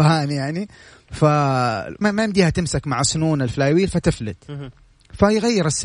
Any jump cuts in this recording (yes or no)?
yes